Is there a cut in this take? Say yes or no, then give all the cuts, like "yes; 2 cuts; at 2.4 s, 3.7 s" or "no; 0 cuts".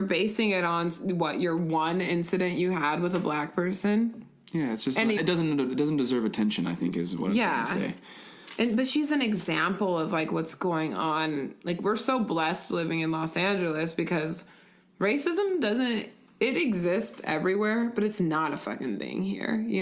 yes; 1 cut; at 5.2 s